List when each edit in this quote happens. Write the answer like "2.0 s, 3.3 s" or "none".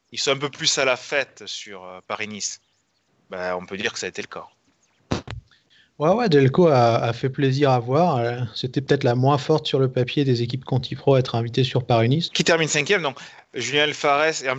12.3 s